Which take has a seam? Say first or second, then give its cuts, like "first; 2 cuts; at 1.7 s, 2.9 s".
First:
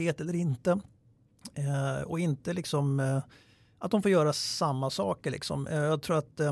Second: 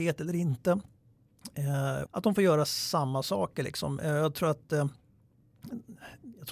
second; 1 cut; at 2.1 s